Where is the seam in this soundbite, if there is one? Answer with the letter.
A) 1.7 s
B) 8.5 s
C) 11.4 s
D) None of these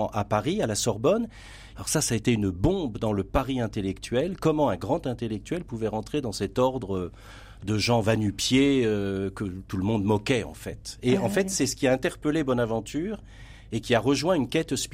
A